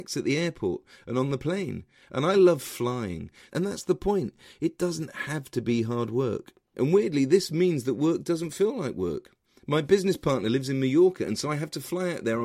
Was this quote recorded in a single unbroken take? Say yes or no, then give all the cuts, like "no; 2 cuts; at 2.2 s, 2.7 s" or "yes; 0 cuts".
no; 3 cuts; at 2.0 s, 3.5 s, 6.7 s